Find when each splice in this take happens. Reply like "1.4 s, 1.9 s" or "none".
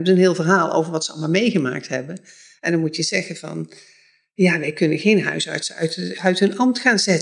none